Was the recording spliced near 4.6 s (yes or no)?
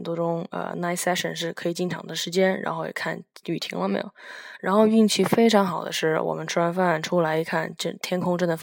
no